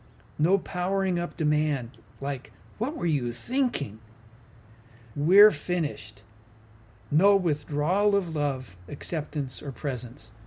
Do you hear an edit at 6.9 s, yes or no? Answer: no